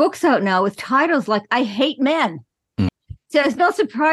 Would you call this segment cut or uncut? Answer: cut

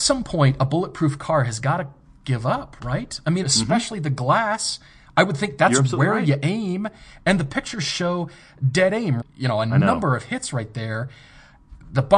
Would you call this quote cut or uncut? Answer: cut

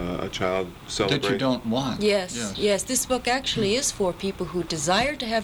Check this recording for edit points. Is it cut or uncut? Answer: uncut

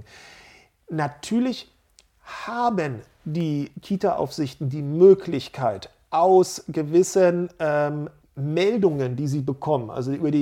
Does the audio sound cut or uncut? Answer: cut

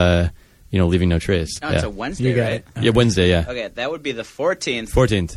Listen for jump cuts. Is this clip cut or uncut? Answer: cut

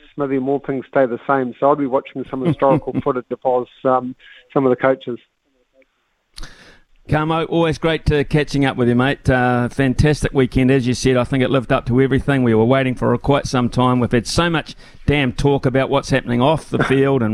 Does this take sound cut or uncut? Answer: uncut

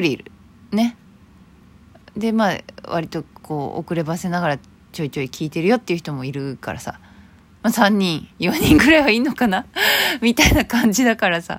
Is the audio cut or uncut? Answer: cut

